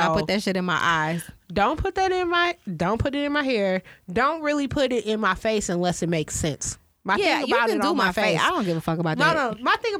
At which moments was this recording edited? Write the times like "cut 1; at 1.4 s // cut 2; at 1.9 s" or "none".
none